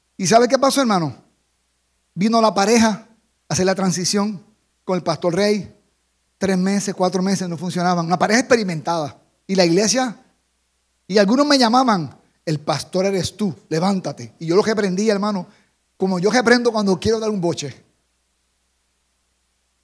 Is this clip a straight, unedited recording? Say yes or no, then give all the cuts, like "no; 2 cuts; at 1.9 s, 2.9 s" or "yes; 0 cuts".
yes; 0 cuts